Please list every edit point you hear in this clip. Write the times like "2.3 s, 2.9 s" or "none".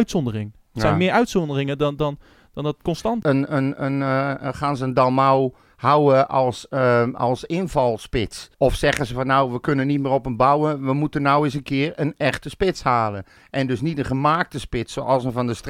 3.2 s, 8.5 s